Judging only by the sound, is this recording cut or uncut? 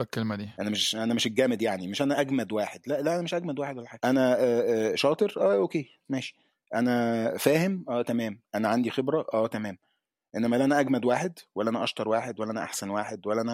uncut